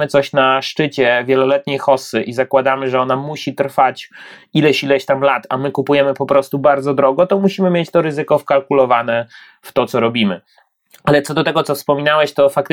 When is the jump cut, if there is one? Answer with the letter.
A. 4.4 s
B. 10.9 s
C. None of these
C